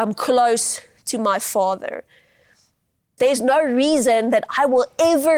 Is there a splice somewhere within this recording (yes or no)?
yes